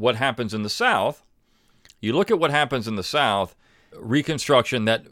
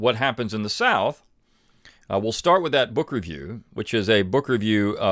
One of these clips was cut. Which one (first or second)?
first